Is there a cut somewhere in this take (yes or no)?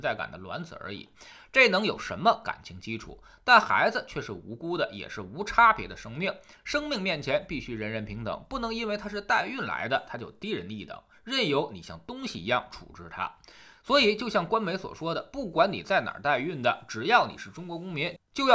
no